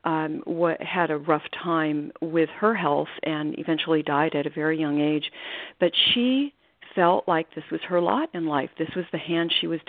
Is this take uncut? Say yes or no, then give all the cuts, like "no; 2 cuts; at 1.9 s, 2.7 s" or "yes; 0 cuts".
yes; 0 cuts